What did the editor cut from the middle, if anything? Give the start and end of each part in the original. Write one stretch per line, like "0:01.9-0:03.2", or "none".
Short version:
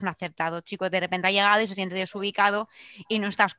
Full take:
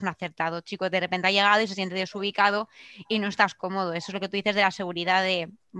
none